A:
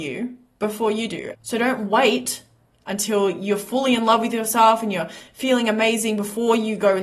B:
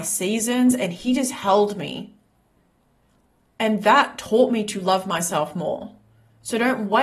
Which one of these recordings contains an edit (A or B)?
A